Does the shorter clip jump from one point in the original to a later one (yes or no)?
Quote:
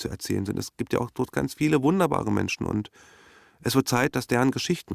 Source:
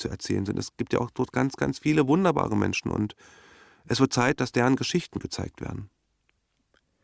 yes